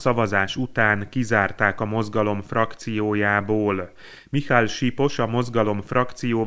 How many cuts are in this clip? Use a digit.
0